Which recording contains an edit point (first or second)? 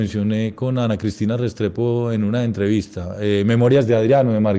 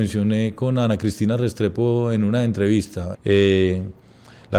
second